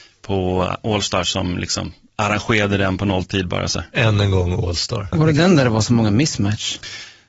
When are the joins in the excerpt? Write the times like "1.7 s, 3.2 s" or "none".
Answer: none